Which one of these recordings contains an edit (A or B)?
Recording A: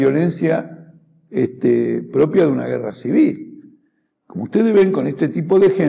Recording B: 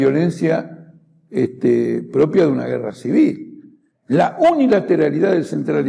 B